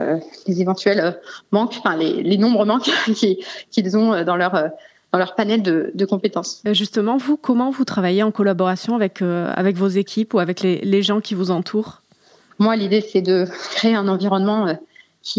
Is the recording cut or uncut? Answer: cut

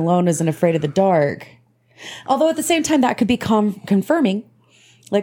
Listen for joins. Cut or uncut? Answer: uncut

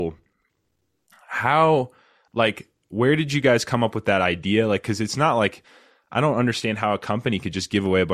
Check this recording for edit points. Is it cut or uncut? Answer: uncut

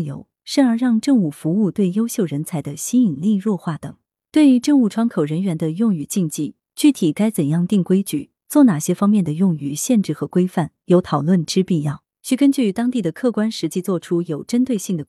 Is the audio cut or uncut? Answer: uncut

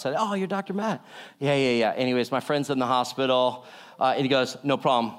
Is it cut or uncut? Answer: uncut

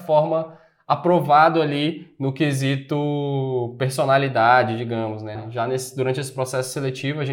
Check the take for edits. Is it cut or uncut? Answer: cut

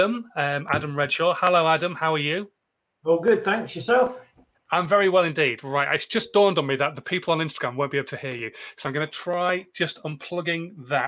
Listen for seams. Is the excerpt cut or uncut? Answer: uncut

